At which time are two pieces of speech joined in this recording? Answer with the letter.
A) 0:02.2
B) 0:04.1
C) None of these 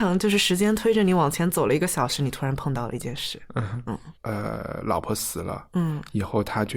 B